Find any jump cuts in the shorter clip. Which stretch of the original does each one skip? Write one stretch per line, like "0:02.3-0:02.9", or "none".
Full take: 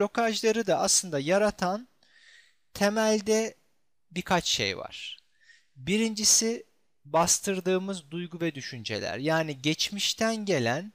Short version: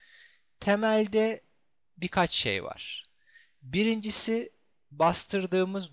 none